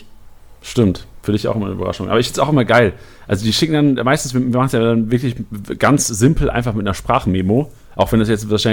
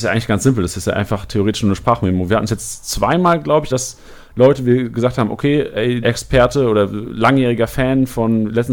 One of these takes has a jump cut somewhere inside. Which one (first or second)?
second